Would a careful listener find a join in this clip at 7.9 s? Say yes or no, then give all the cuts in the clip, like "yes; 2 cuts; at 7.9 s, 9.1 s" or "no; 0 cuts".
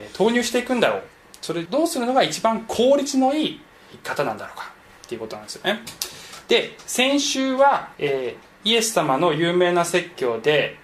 yes; 3 cuts; at 1.7 s, 3.9 s, 7.9 s